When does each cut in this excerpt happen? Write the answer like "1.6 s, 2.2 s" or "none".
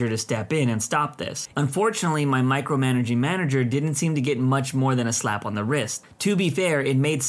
1.5 s